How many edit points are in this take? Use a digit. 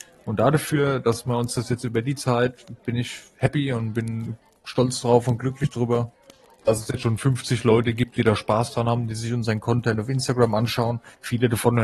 0